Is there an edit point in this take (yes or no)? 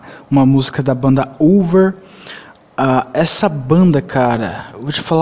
no